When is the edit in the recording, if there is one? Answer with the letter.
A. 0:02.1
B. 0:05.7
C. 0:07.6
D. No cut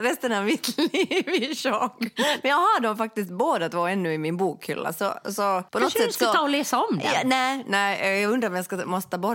B